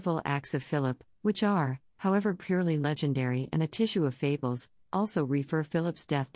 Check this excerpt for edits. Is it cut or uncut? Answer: uncut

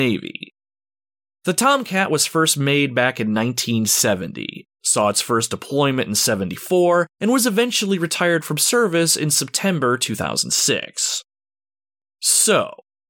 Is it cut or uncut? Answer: cut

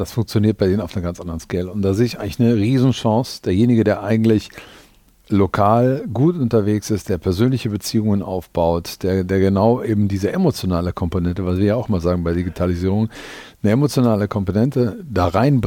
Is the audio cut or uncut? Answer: uncut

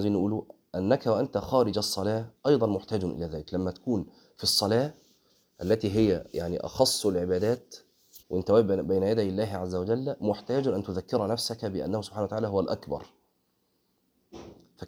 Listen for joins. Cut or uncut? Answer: cut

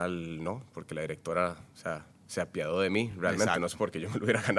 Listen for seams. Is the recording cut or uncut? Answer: uncut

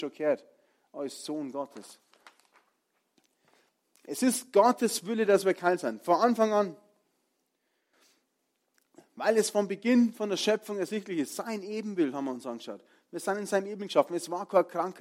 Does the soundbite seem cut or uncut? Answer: uncut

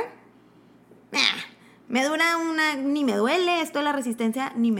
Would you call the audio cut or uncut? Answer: uncut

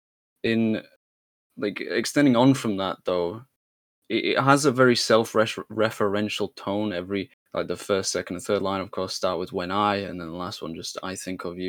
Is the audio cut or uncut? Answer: uncut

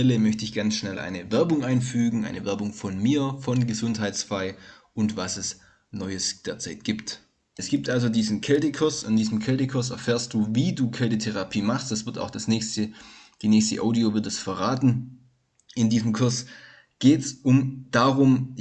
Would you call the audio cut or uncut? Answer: cut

